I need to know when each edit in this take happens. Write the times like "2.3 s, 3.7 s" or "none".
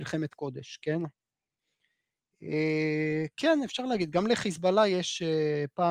1.0 s